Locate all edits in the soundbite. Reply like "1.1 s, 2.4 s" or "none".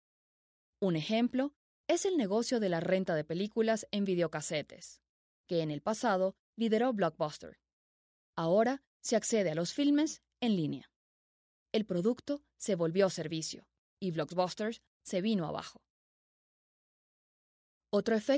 none